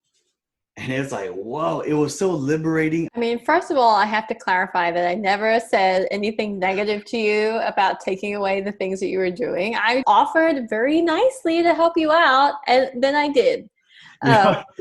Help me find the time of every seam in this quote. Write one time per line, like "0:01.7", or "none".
0:03.1
0:10.0